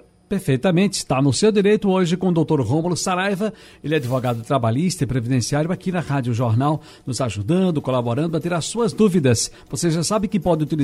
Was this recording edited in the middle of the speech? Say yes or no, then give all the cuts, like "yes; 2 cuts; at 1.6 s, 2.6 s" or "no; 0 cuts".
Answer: no; 0 cuts